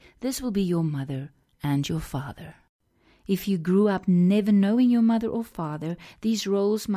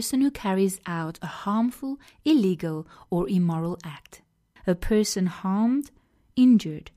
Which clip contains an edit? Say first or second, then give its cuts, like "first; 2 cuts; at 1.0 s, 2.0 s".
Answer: second; 1 cut; at 4.6 s